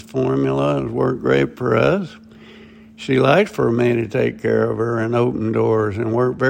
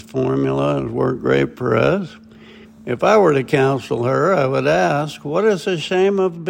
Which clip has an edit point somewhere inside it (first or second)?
second